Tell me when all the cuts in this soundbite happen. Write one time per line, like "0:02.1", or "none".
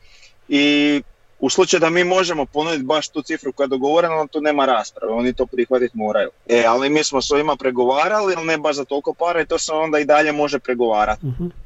0:06.4
0:08.4